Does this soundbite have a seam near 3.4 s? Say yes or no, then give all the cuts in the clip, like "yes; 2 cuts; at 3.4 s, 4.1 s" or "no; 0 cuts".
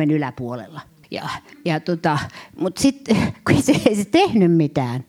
no; 1 cut; at 1.0 s